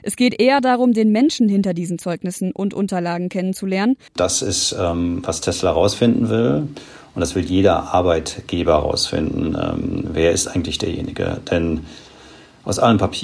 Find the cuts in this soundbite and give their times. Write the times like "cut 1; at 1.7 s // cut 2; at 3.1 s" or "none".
cut 1; at 4.1 s